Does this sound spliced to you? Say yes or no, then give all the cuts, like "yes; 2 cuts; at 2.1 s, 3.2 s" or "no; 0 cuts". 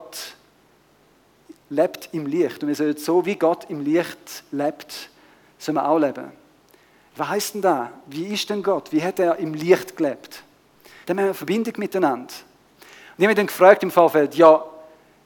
yes; 1 cut; at 11.0 s